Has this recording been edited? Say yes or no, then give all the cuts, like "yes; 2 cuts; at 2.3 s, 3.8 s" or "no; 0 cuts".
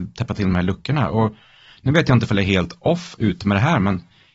no; 0 cuts